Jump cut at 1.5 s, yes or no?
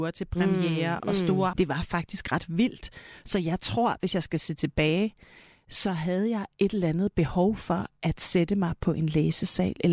yes